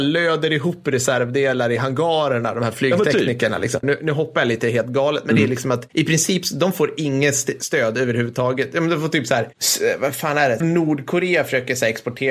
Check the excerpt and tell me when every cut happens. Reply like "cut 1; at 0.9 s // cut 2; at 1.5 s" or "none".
cut 1; at 3.8 s // cut 2; at 10.6 s